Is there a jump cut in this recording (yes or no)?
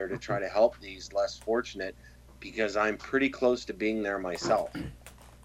no